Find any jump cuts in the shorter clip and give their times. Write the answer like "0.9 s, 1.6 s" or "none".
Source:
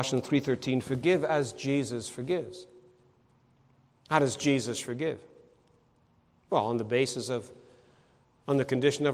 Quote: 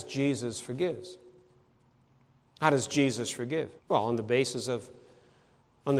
3.8 s